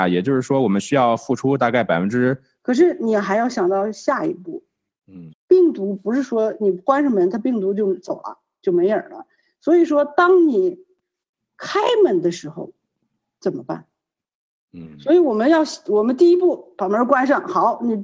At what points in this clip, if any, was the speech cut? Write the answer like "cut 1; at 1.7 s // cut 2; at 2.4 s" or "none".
cut 1; at 2.6 s // cut 2; at 5.3 s